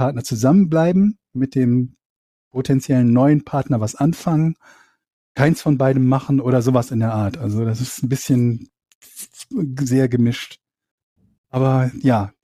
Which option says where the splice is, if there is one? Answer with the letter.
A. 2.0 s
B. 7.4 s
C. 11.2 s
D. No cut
D